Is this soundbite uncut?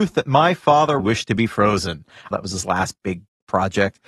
no; 2 cuts; at 1.0 s, 2.3 s

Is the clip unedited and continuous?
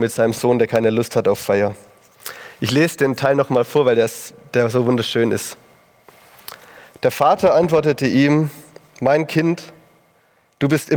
yes; 0 cuts

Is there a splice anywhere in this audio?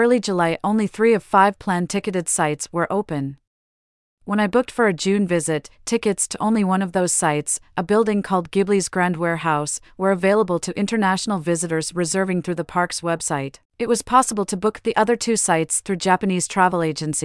yes; 1 cut; at 13.7 s

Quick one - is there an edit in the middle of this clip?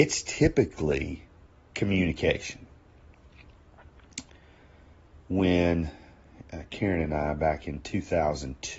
no; 0 cuts

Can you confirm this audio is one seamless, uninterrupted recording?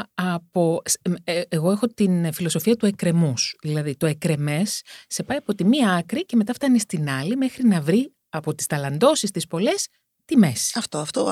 yes; 0 cuts

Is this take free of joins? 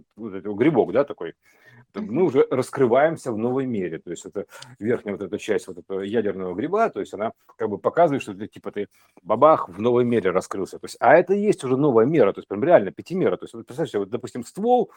yes; 0 cuts

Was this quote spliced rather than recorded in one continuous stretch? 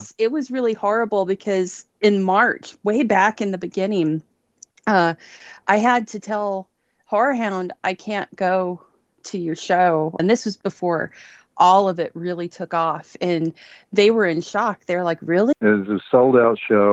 yes; 2 cuts; at 10.2 s, 15.5 s

